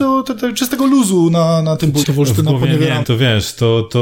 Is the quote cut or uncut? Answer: cut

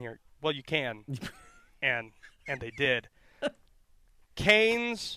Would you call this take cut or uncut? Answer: uncut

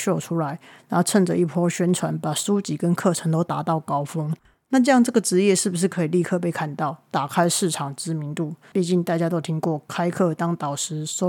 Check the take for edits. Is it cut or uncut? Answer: cut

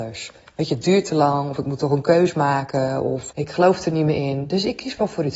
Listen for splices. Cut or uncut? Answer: cut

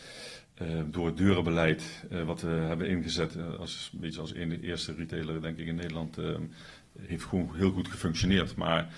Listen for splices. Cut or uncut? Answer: uncut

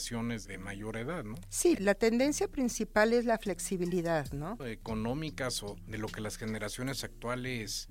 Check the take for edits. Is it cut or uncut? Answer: cut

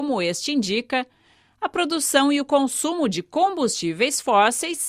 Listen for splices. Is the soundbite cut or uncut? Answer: uncut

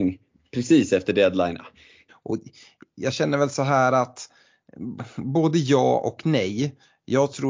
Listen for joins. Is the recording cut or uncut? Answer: cut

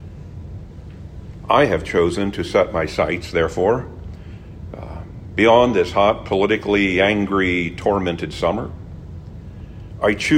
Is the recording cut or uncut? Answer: uncut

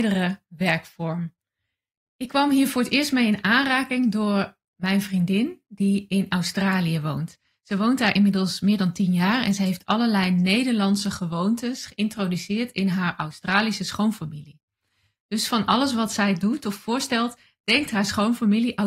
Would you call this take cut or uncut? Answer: uncut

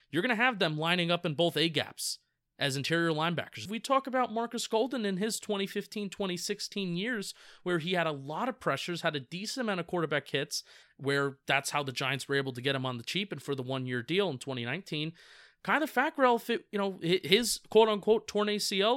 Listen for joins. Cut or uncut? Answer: cut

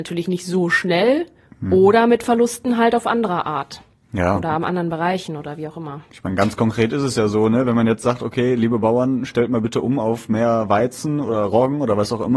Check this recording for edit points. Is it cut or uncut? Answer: uncut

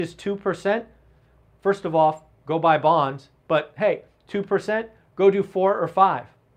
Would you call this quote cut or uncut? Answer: uncut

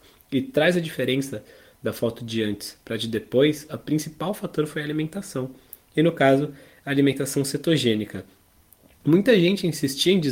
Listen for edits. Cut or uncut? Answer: uncut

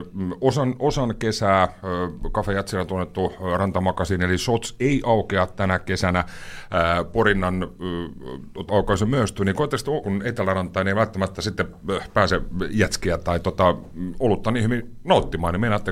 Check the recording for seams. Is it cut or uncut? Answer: cut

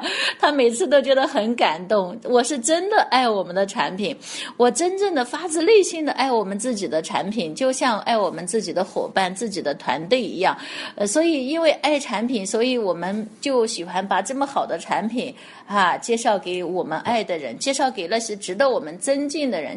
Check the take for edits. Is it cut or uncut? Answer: uncut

